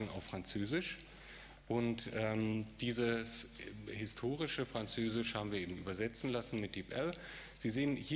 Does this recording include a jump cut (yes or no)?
no